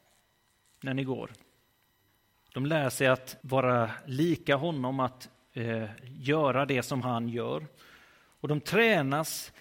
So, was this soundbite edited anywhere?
yes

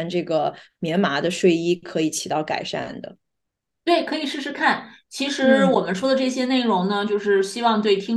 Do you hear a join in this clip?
no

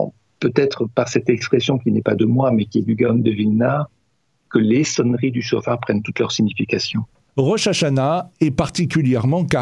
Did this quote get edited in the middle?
yes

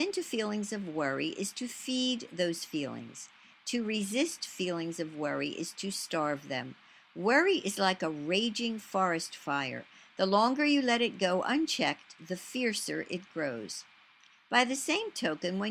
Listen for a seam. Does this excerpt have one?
no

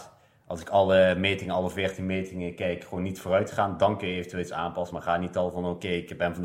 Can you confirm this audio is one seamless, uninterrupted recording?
yes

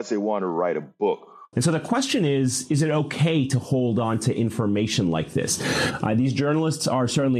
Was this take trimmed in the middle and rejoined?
yes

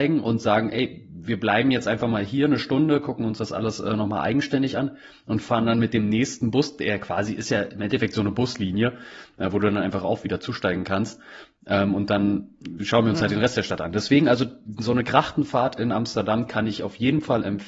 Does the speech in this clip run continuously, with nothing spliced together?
yes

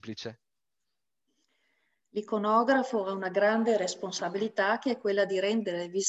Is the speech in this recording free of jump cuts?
yes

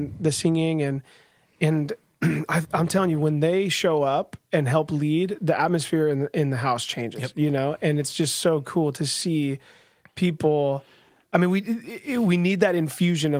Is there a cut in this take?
no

